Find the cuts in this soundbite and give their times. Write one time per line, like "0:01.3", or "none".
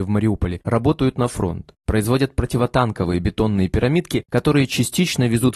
none